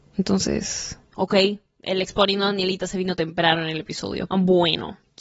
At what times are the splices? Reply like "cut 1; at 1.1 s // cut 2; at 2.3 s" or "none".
cut 1; at 1.1 s // cut 2; at 4.3 s